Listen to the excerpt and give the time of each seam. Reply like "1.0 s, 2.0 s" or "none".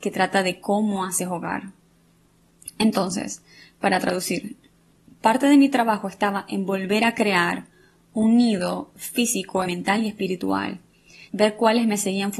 9.6 s, 11.3 s